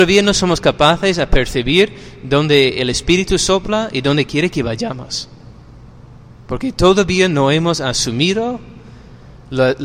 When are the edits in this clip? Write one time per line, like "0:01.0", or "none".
0:06.5